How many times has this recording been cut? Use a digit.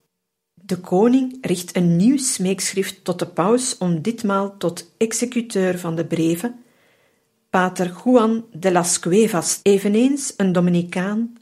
1